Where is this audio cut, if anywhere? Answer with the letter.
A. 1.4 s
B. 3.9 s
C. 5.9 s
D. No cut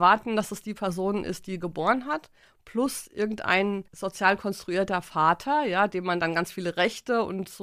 B